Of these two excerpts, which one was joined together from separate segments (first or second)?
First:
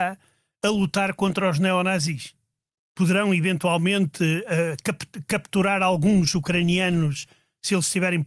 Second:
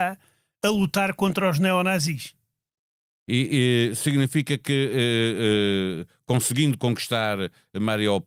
first